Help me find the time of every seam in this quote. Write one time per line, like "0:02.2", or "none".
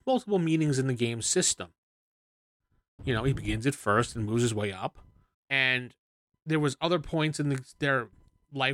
0:03.0
0:05.3